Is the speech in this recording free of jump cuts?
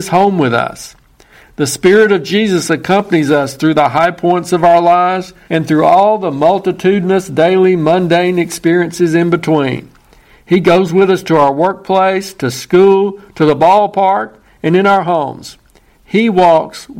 no; 1 cut; at 5.5 s

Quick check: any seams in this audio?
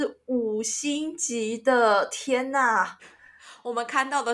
no; 0 cuts

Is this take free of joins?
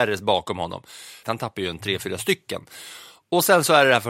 no; 1 cut; at 1.2 s

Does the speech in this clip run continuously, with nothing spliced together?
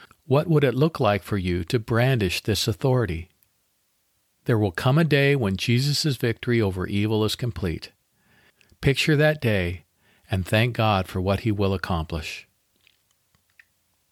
no; 1 cut; at 4.3 s

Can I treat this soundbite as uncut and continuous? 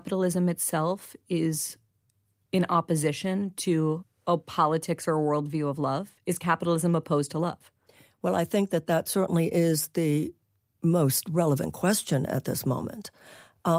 yes; 0 cuts

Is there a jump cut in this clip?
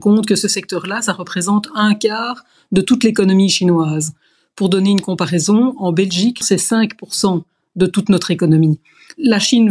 yes; 1 cut; at 6.4 s

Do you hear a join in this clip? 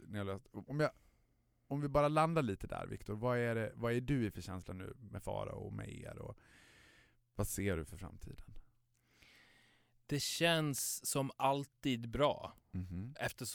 no; 0 cuts

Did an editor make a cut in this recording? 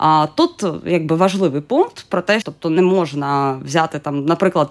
yes; 1 cut; at 2.4 s

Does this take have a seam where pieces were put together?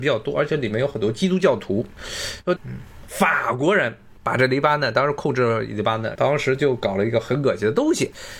yes; 2 cuts; at 2.6 s, 6.2 s

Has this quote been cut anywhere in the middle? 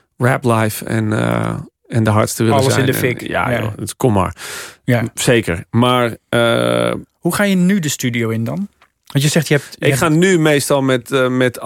no; 0 cuts

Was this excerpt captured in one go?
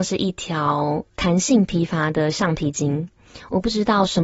yes; 0 cuts

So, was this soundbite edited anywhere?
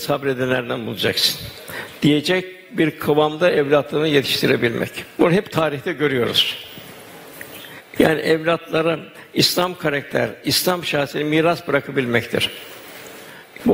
no; 0 cuts

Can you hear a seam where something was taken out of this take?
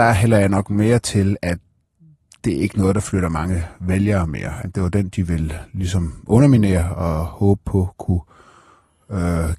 yes; 1 cut; at 4.6 s

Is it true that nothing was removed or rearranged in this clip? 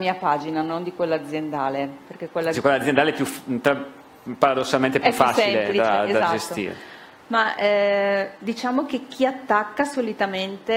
yes; 0 cuts

